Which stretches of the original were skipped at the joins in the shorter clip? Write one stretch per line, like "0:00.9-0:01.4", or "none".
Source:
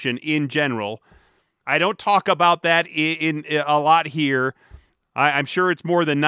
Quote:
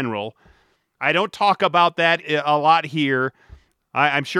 0:02.9-0:03.4